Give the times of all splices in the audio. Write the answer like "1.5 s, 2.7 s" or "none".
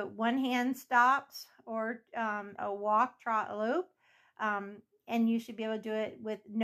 2.6 s